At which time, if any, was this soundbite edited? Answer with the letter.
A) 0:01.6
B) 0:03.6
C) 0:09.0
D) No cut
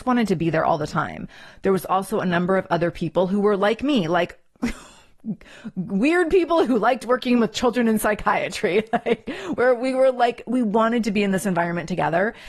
D